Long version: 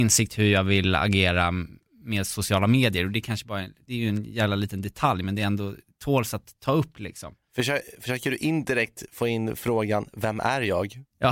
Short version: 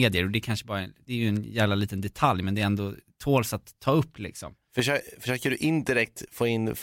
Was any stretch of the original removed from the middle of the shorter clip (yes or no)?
no